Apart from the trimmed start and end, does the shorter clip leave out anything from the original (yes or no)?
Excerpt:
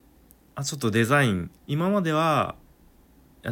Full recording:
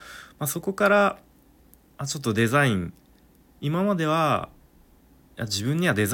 yes